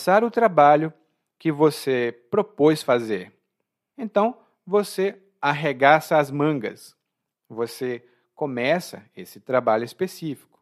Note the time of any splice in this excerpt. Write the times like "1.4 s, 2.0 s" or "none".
3.9 s